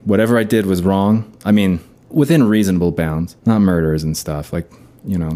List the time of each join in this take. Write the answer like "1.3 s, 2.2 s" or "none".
2.1 s, 3.4 s